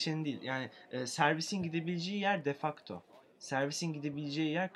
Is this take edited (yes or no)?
no